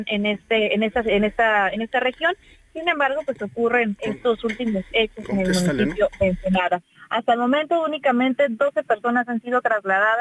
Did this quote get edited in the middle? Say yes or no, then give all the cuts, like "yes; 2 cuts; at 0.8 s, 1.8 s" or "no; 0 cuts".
no; 0 cuts